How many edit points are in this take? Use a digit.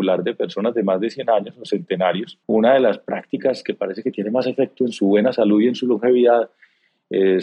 1